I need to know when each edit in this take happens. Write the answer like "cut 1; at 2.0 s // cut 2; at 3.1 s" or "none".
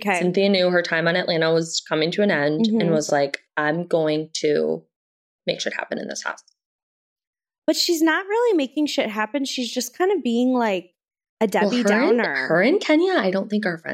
none

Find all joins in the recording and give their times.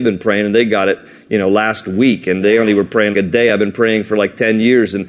cut 1; at 3.1 s

